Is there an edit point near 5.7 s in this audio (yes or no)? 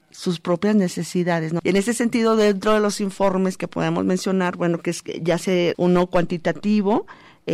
yes